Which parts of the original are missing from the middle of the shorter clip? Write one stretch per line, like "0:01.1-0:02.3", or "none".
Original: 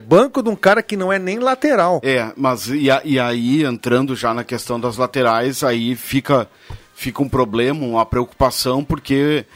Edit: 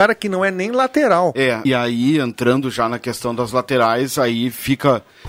0:02.3-0:03.1